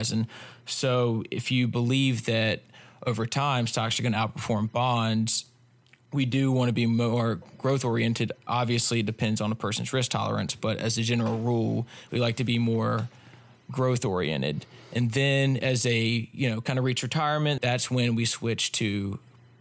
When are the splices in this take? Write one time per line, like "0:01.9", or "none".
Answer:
0:12.1
0:17.6

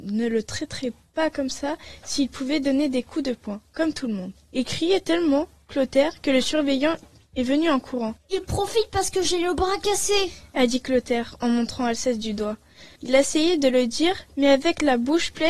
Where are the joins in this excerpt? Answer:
0:08.2
0:13.0

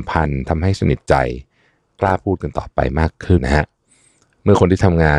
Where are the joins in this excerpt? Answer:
0:03.4

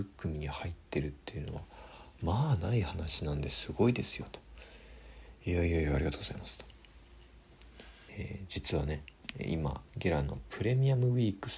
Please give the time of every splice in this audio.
0:08.1
0:09.9

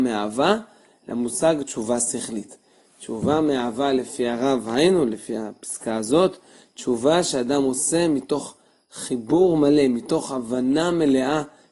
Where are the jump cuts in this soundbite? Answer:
none

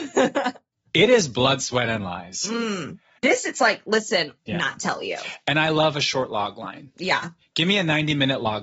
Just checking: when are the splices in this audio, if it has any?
0:03.2
0:04.4

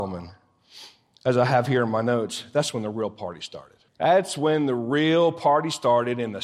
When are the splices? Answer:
0:03.9

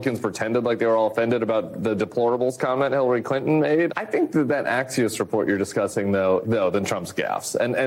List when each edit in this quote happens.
0:03.9
0:06.4

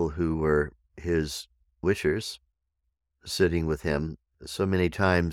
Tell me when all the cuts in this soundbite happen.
0:01.8
0:04.3

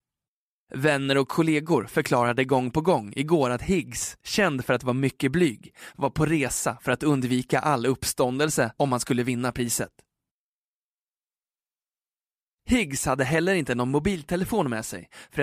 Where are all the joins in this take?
none

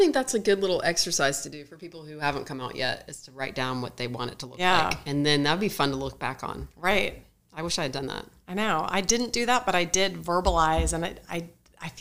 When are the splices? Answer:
none

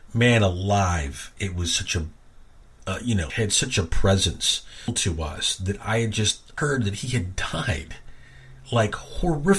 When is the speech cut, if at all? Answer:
0:03.3

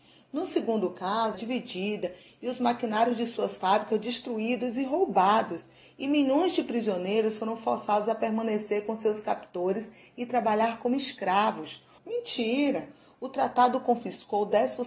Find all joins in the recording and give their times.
0:01.3
0:12.0

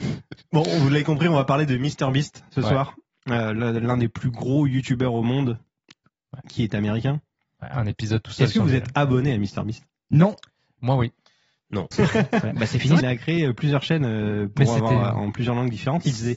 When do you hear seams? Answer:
0:11.9
0:13.0

